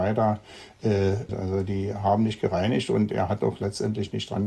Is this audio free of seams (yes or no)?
no